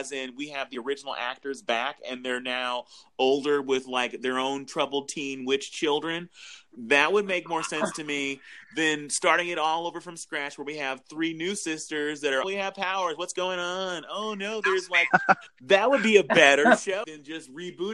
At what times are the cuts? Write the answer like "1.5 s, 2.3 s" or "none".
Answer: 12.4 s, 15.1 s, 17.0 s